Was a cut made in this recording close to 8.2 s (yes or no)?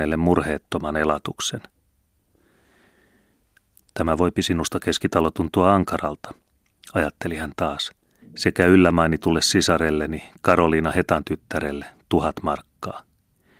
yes